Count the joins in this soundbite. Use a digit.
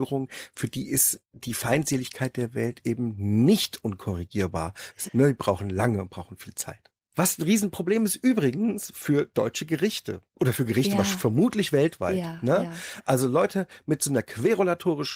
1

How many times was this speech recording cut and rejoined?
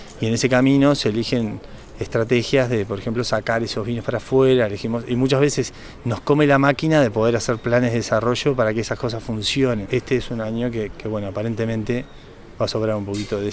2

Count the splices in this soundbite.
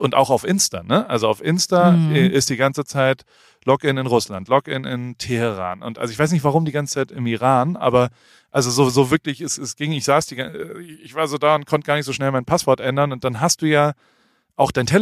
0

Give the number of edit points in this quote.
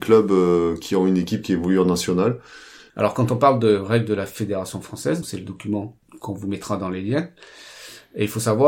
2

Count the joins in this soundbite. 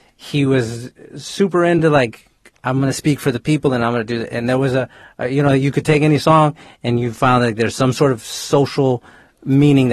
0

